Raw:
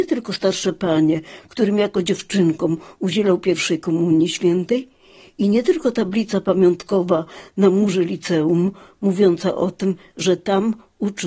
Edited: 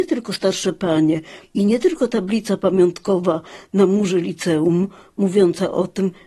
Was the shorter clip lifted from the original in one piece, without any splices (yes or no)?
no